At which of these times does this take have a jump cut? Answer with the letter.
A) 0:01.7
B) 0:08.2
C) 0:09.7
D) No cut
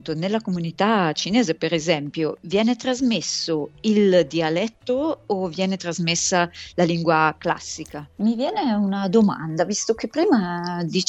B